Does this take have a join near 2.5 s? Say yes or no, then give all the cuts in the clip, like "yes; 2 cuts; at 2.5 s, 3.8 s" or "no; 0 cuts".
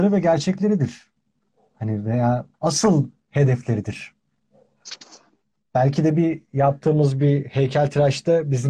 yes; 1 cut; at 2.5 s